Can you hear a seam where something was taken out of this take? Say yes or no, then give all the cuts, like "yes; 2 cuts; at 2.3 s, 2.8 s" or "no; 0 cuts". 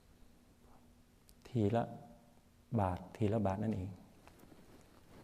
no; 0 cuts